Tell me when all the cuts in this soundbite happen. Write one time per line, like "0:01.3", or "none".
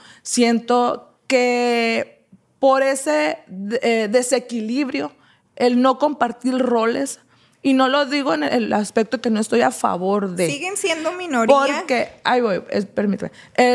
0:08.7